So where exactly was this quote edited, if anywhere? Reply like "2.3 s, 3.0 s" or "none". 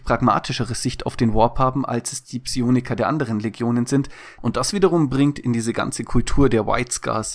4.4 s